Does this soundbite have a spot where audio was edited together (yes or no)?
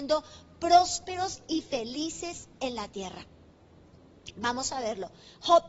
no